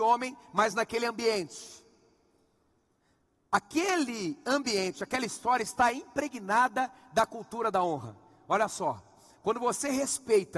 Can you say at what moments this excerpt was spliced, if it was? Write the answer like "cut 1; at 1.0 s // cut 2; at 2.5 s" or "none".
none

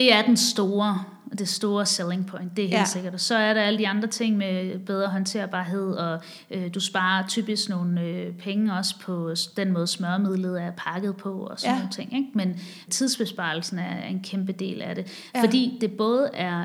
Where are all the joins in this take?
cut 1; at 12.9 s

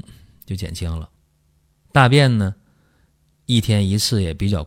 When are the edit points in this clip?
none

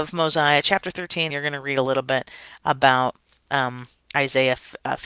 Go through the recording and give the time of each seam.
cut 1; at 1.3 s

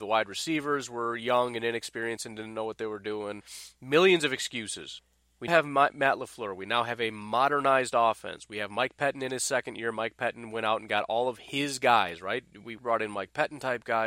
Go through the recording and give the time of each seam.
cut 1; at 5.5 s // cut 2; at 12.8 s

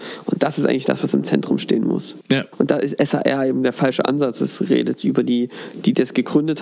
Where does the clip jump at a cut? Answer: none

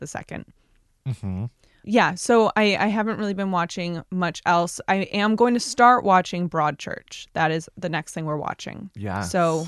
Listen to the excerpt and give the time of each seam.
none

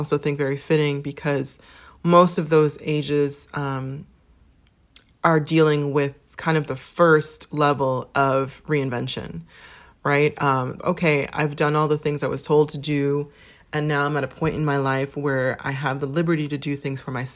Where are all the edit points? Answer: cut 1; at 10.8 s

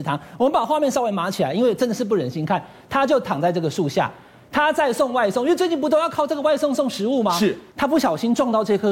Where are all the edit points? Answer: cut 1; at 7.7 s

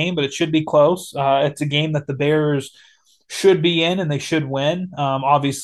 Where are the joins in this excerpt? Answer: none

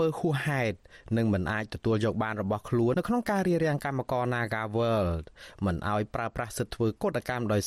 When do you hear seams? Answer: cut 1; at 2.9 s

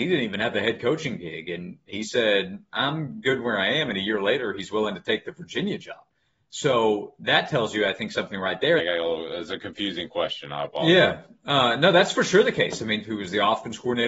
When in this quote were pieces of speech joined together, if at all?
cut 1; at 8.8 s // cut 2; at 13.0 s

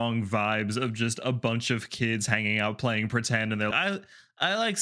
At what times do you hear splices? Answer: cut 1; at 3.7 s

